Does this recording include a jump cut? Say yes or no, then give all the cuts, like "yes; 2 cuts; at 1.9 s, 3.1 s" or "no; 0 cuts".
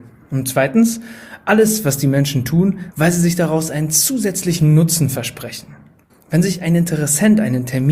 yes; 2 cuts; at 2.9 s, 6.1 s